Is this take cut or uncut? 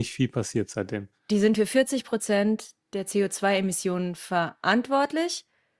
uncut